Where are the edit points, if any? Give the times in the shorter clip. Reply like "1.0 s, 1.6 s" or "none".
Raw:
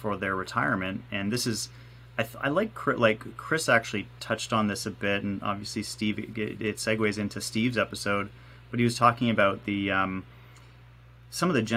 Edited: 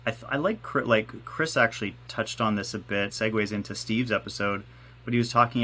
3.1 s